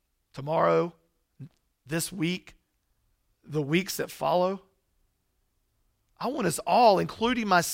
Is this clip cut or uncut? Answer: uncut